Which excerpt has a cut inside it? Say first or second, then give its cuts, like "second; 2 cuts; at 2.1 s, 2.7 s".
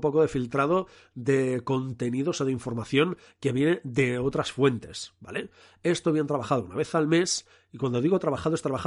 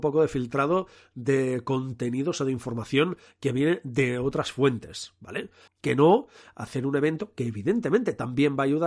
second; 1 cut; at 5.7 s